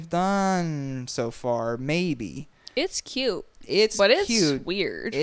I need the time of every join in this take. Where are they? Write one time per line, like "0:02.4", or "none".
none

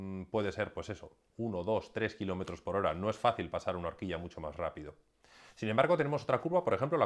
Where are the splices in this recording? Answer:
none

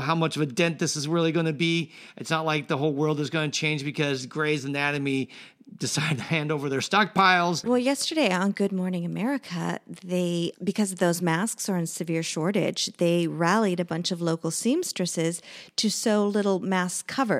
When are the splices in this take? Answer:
0:07.6
0:10.5

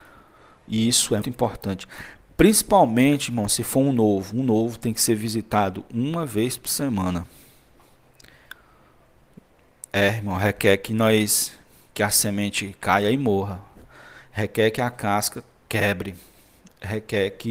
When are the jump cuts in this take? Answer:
0:01.2

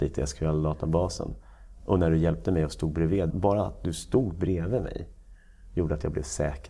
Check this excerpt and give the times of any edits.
0:03.3

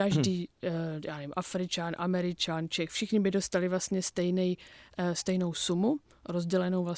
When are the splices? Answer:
none

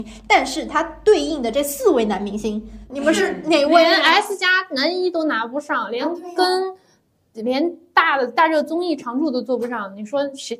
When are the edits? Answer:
0:02.9

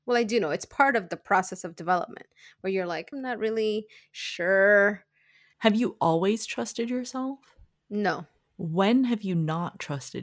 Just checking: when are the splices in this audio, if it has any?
0:03.1
0:05.5

